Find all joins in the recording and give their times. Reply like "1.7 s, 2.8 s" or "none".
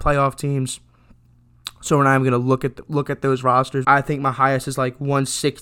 3.8 s